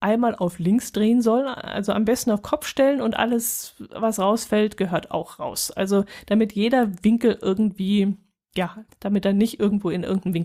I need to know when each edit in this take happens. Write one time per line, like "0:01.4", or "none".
0:08.9